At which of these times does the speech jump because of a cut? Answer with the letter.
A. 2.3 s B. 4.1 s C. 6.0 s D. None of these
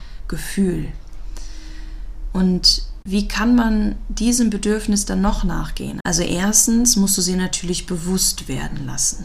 C